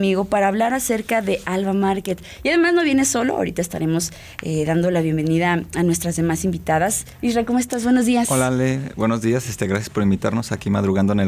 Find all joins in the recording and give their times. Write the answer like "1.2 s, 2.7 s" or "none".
none